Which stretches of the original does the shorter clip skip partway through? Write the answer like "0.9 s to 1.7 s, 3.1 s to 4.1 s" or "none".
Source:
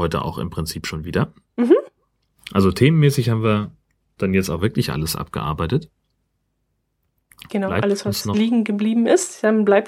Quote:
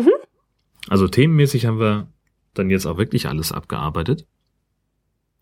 none